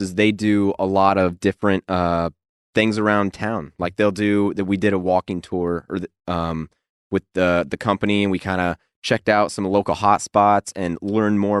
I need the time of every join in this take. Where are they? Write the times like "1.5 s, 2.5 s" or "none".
none